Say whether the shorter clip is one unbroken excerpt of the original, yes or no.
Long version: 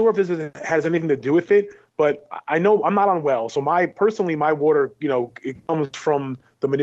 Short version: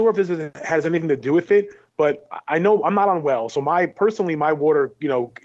yes